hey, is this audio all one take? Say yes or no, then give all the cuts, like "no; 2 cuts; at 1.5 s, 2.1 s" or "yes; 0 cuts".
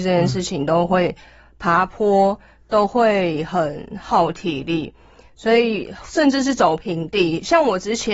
yes; 0 cuts